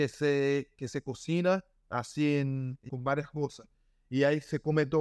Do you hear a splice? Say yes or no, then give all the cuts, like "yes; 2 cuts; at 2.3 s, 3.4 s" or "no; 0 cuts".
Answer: yes; 1 cut; at 2.9 s